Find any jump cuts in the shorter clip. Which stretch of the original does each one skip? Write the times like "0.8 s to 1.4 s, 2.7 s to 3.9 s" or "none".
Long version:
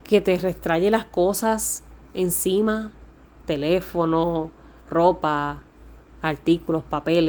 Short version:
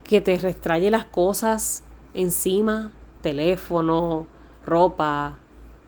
3.1 s to 3.4 s

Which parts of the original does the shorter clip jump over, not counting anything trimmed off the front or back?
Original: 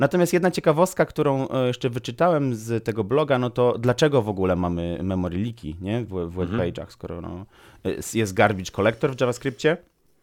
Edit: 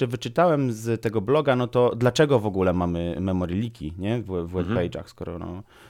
none

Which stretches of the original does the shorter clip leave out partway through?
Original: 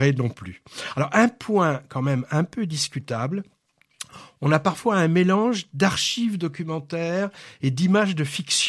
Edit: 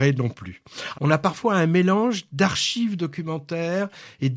0.9 s to 4.4 s

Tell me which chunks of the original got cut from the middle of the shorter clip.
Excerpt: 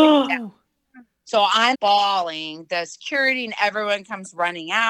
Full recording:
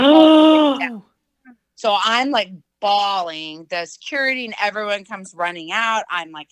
2.2 s to 2.7 s

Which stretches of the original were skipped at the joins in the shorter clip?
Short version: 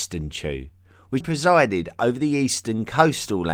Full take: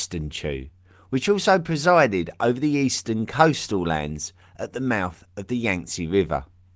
1.2 s to 1.6 s

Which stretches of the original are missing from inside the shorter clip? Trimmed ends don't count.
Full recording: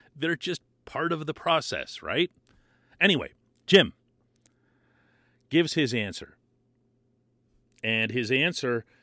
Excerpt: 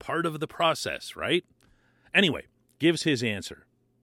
3.6 s to 5.5 s

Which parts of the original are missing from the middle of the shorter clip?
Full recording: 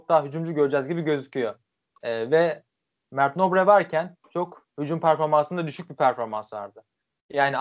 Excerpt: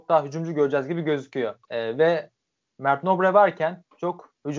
1.6 s to 2.0 s

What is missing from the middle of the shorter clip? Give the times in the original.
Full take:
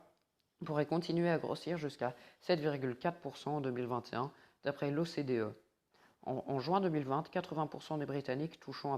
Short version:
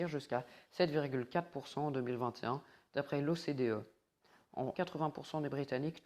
6.4 s to 7.3 s

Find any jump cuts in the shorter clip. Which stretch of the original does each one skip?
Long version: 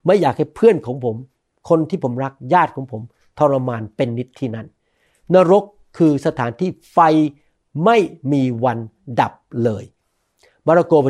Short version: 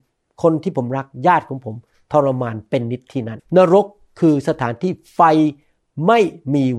4.7 s to 5.2 s

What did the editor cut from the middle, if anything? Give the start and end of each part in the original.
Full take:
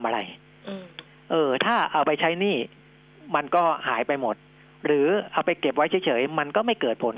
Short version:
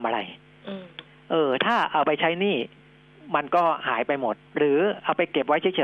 4.5 s to 4.7 s

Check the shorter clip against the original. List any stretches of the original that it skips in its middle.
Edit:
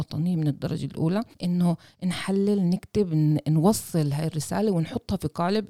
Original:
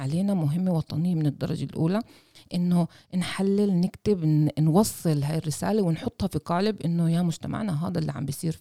2.1 s to 2.4 s

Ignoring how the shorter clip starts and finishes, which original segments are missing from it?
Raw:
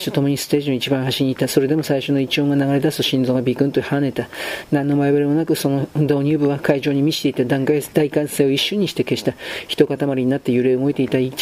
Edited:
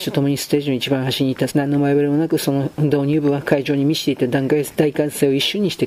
1.5 s to 4.7 s

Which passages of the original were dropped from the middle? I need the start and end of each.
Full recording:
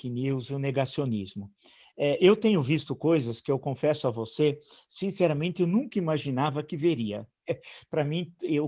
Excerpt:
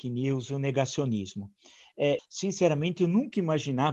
2.2 s to 4.8 s

